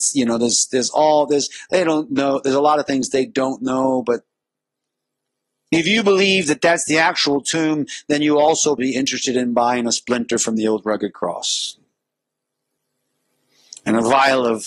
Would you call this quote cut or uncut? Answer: cut